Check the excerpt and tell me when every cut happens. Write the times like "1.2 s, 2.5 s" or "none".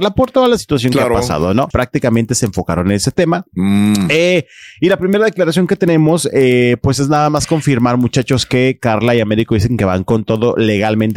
1.7 s